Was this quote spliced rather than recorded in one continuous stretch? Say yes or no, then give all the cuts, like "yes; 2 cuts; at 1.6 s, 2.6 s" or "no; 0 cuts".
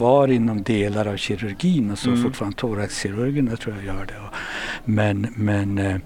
no; 0 cuts